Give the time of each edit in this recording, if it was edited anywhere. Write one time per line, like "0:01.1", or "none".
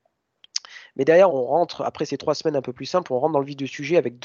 0:01.3